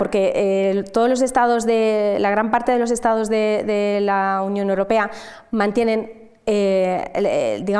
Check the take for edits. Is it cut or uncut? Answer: uncut